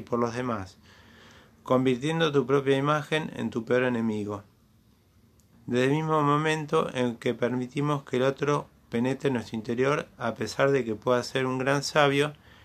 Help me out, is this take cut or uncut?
cut